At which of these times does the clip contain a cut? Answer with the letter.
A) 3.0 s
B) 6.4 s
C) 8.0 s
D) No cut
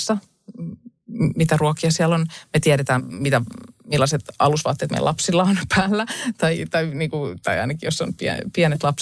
A